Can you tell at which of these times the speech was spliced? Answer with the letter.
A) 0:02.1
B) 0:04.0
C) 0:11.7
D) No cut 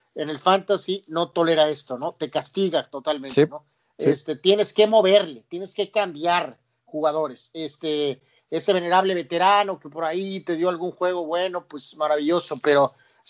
D